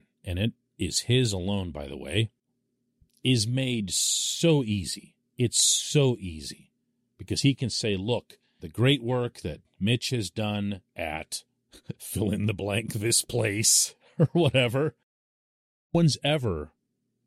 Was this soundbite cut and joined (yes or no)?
yes